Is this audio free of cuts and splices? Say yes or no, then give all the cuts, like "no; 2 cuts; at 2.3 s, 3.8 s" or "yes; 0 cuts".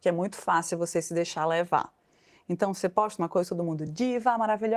yes; 0 cuts